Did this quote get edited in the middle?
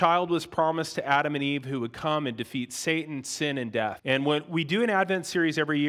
yes; 1 cut; at 4.0 s

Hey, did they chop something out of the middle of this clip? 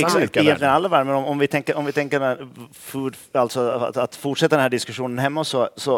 no; 0 cuts

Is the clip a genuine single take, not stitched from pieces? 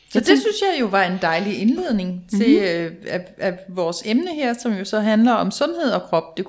yes; 0 cuts

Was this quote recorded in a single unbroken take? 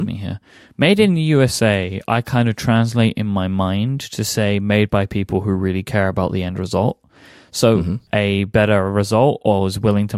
no; 1 cut; at 8.1 s

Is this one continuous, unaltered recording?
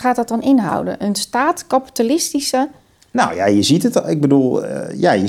yes; 0 cuts

